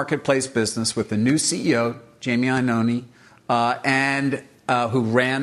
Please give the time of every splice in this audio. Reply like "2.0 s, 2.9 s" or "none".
none